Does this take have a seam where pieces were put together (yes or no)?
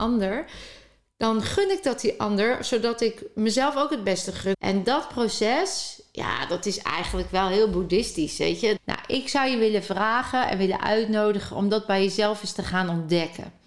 yes